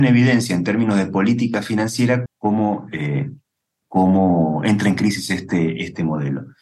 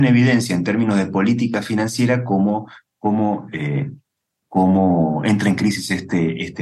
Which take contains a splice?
first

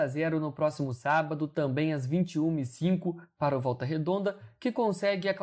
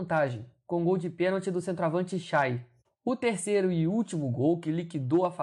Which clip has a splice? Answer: second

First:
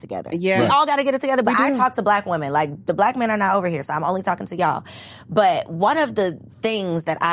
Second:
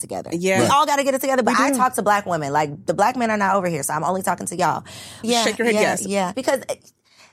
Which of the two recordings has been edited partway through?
second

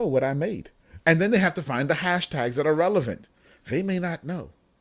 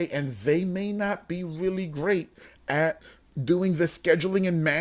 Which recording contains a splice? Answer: first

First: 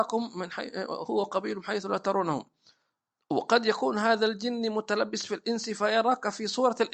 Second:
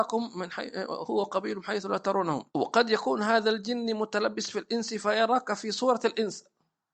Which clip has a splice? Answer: second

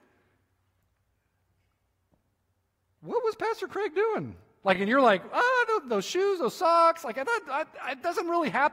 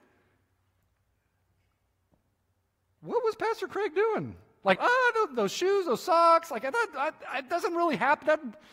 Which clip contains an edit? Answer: second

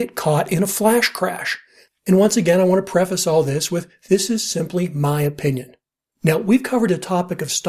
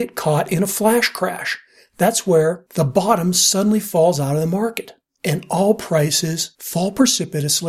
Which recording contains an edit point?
first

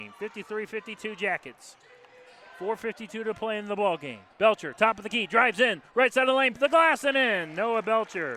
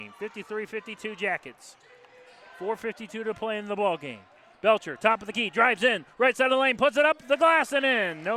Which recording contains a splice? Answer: first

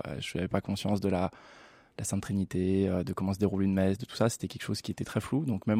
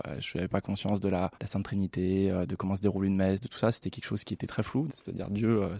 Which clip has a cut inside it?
second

